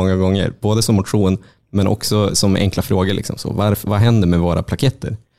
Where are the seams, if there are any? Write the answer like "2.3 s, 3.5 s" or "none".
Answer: none